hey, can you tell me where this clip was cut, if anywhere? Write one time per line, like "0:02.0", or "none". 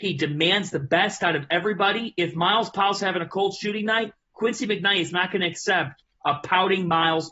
none